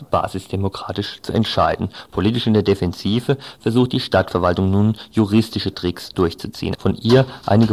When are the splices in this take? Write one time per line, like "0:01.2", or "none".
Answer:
0:06.8